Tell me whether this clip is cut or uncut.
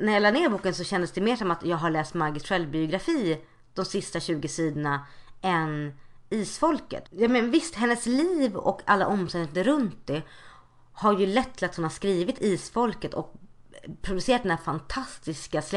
cut